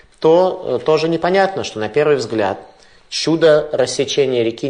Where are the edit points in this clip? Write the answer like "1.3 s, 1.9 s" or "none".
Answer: none